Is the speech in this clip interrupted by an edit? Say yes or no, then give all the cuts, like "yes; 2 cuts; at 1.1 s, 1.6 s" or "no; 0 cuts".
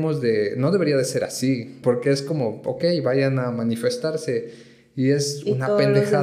yes; 1 cut; at 1.8 s